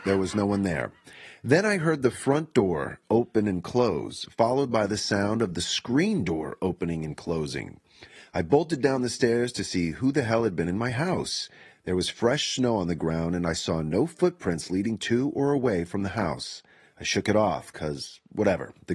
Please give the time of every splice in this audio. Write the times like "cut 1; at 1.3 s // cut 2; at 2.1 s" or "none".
none